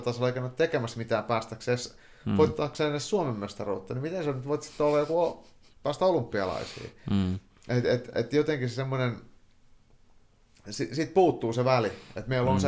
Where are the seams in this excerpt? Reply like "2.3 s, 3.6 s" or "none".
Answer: none